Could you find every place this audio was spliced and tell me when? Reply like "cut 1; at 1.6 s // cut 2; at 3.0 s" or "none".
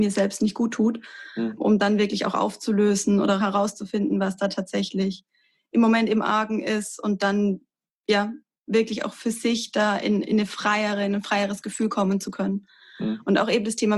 none